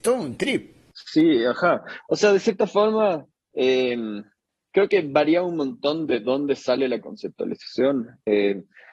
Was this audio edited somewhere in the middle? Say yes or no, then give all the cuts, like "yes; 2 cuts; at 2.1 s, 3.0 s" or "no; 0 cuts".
no; 0 cuts